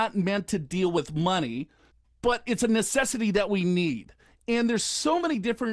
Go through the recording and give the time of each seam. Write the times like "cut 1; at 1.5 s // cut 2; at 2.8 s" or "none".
none